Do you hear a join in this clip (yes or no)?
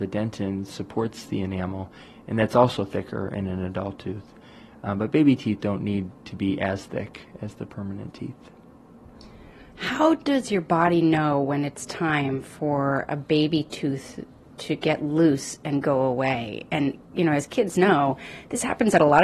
no